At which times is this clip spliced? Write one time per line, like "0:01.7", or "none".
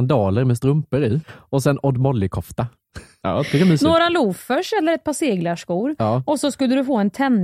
0:01.2
0:03.2